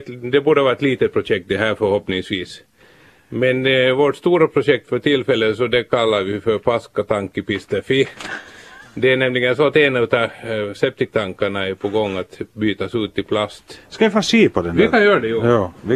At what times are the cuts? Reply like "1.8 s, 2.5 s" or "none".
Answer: none